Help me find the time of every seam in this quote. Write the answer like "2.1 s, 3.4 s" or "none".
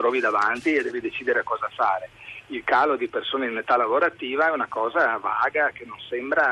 none